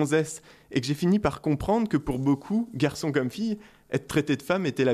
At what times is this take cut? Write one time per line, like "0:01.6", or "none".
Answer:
none

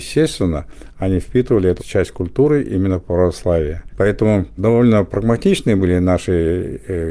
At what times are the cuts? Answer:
0:01.8
0:03.9

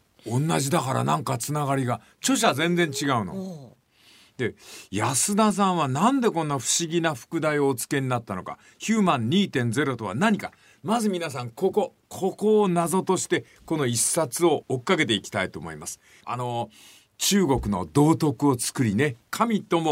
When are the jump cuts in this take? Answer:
0:16.2

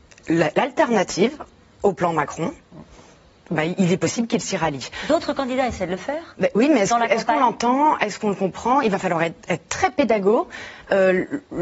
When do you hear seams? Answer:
none

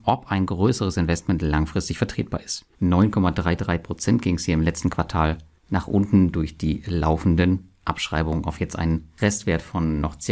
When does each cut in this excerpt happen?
0:02.7

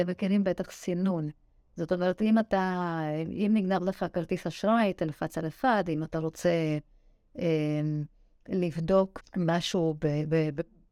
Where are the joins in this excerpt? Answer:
0:09.2

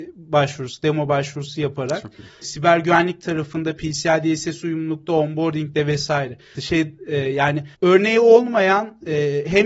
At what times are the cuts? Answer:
0:02.4
0:06.6
0:07.7

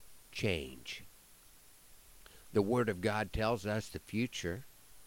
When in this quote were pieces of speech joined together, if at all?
none

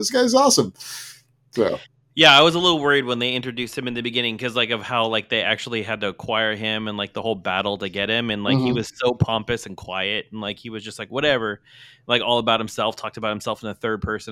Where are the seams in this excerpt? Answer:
none

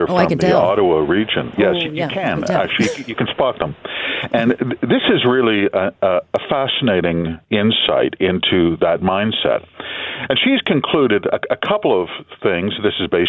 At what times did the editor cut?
none

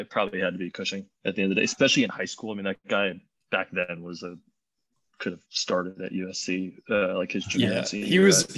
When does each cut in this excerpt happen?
0:01.2

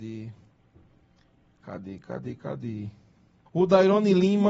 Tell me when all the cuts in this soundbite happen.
0:03.5

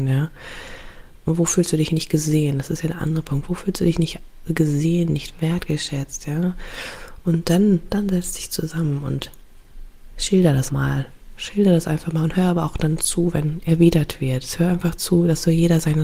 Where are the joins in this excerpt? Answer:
0:01.2
0:10.7

